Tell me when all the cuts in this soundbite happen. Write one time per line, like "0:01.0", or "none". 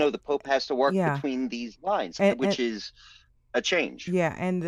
none